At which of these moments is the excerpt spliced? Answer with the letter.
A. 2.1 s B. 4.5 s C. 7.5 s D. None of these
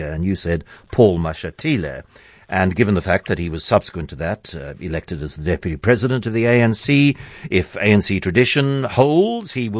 D